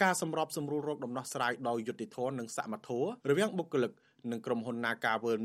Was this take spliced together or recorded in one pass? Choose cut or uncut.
cut